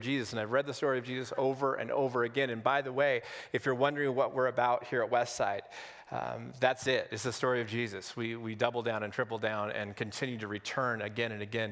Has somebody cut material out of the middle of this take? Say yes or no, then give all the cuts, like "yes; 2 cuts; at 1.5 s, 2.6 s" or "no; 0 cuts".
no; 0 cuts